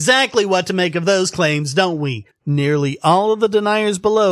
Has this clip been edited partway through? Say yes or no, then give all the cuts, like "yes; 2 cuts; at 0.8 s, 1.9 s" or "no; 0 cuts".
yes; 1 cut; at 2.3 s